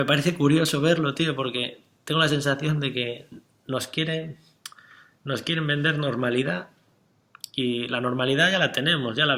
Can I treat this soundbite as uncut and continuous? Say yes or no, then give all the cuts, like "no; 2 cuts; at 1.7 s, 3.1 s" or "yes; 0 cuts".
yes; 0 cuts